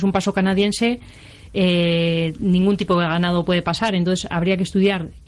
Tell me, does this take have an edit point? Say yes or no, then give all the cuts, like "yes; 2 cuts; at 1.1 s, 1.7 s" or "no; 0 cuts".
no; 0 cuts